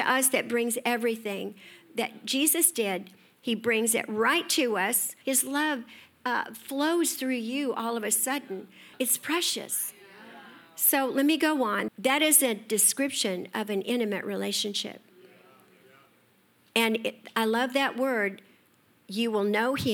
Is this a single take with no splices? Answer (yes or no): no